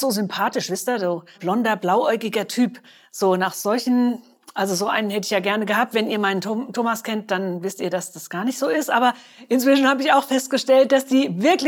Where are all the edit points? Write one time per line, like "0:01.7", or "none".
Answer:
0:01.3